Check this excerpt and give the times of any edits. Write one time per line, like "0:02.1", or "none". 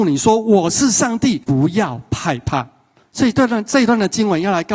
0:01.4